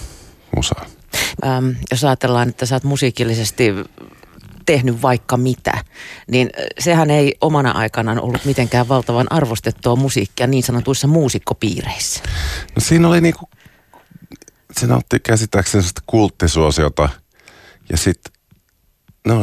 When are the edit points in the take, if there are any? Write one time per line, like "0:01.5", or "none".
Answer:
0:01.4